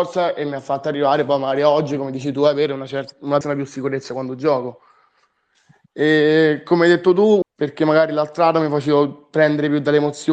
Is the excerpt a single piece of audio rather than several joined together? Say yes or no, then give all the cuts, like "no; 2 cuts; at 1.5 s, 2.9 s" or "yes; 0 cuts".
no; 2 cuts; at 3.4 s, 7.4 s